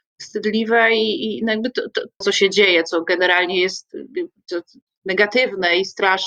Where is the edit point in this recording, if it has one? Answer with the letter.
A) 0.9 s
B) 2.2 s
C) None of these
B